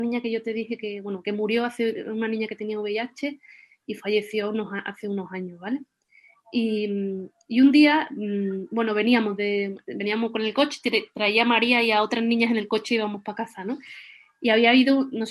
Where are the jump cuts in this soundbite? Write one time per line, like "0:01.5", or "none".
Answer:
none